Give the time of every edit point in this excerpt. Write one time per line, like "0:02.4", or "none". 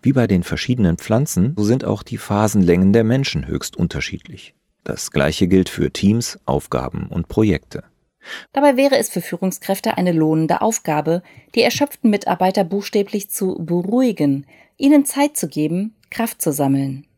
0:01.6
0:08.4